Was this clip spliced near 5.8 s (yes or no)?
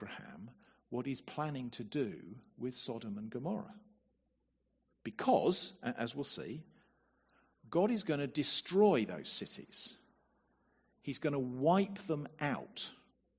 no